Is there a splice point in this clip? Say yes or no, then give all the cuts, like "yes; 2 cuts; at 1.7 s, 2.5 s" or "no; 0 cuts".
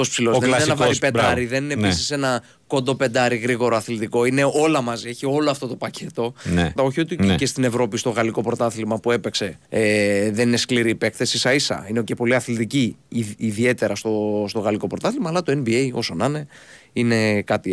yes; 2 cuts; at 6.8 s, 9.6 s